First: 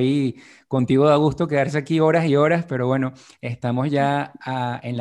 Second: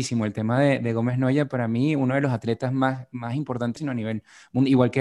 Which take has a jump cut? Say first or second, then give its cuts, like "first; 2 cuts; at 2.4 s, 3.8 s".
second; 1 cut; at 3.8 s